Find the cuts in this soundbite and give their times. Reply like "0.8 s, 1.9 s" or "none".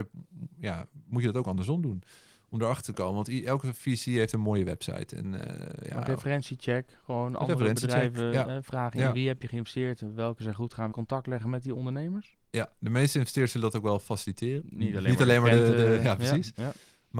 10.9 s, 12.4 s, 14.6 s

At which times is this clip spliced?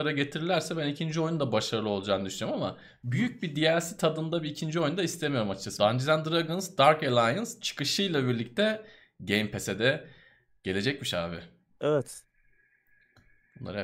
5.8 s, 11.7 s

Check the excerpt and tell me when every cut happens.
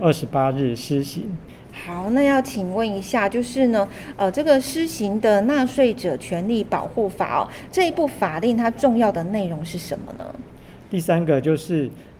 1.7 s, 10.8 s

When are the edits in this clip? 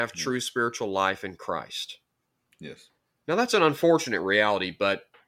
none

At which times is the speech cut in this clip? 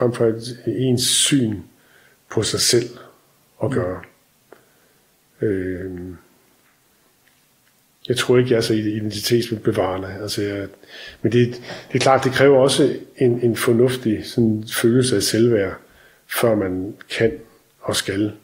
none

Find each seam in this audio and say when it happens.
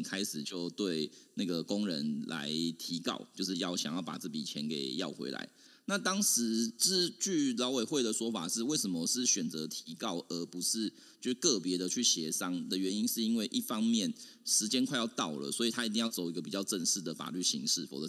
none

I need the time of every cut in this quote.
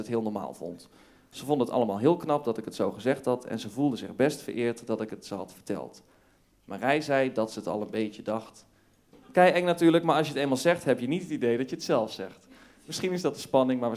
9.1 s

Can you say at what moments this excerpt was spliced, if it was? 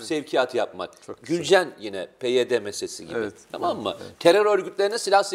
none

